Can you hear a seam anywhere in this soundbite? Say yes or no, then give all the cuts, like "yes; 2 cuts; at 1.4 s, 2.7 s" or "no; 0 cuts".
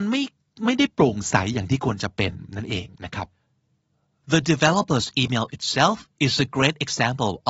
no; 0 cuts